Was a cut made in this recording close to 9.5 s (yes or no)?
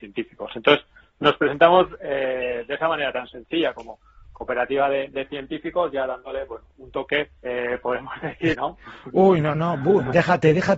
yes